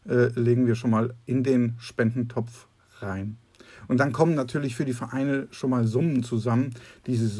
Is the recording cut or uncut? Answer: uncut